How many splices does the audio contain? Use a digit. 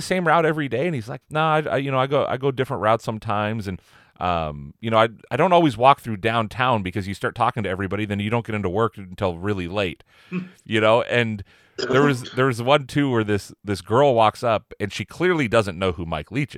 1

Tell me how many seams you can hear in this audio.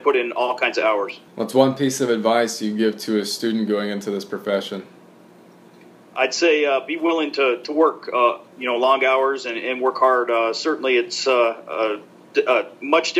1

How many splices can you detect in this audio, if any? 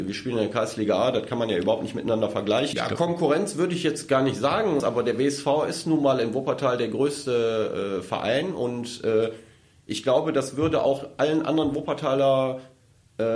2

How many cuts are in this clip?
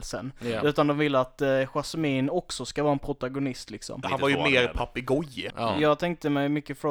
2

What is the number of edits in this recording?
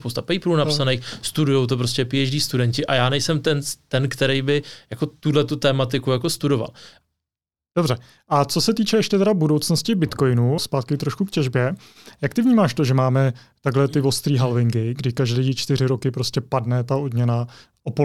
2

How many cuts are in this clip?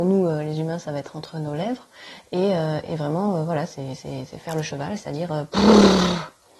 0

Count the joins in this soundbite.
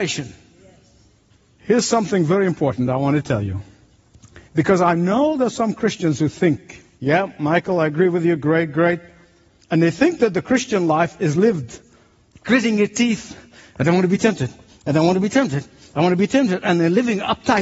1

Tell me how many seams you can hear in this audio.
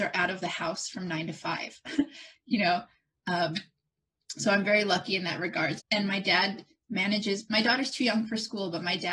1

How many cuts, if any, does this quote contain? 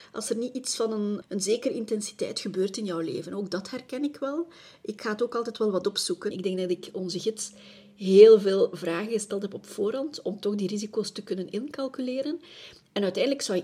2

